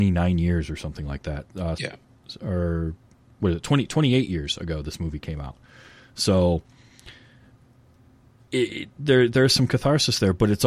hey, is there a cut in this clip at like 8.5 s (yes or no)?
no